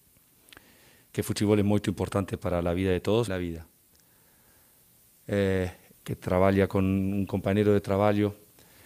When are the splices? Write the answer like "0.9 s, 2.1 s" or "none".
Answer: 3.3 s, 5.9 s